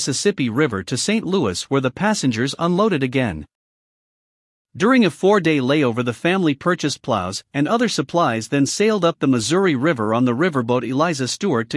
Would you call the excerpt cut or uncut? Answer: uncut